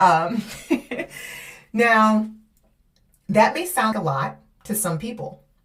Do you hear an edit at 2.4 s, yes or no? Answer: no